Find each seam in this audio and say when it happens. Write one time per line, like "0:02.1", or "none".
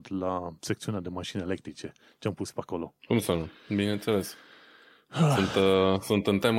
none